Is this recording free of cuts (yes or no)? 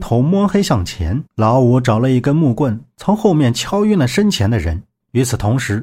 no